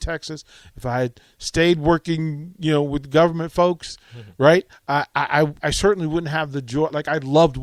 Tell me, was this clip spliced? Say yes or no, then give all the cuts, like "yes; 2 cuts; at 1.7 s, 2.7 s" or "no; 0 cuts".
yes; 1 cut; at 5.6 s